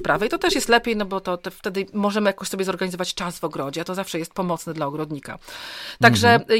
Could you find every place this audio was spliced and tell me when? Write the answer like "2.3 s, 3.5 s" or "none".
none